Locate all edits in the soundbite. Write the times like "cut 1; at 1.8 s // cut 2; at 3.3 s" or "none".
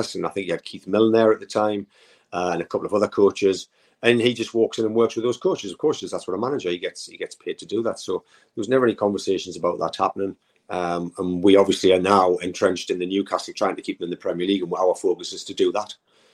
none

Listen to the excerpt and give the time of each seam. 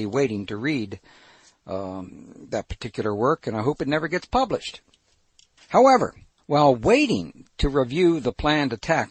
none

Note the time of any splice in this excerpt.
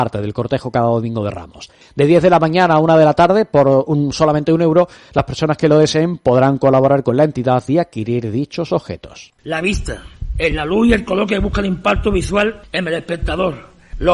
cut 1; at 1.8 s // cut 2; at 9.3 s

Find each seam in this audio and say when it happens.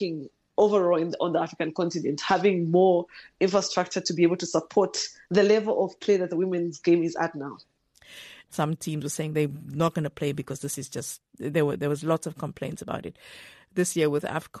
cut 1; at 8.5 s

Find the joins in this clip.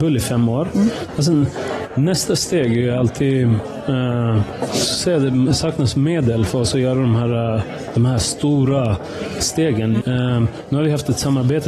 cut 1; at 1.1 s // cut 2; at 10.0 s

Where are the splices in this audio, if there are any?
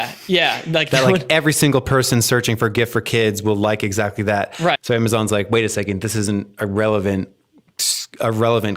cut 1; at 4.8 s

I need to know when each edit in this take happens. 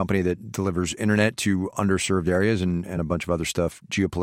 none

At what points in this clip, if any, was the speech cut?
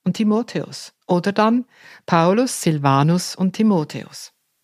cut 1; at 1.0 s

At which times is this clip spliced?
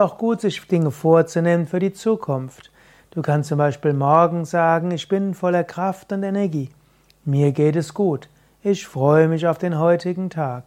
none

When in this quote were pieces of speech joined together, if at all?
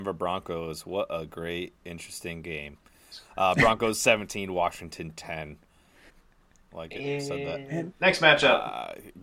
cut 1; at 6.1 s // cut 2; at 7.9 s

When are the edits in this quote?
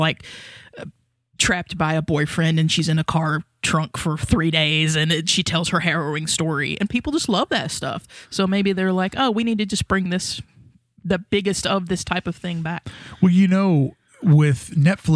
none

